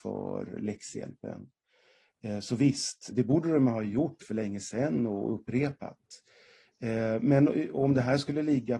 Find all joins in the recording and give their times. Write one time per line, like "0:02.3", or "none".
0:03.1